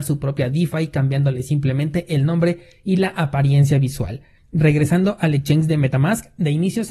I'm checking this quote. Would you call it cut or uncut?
cut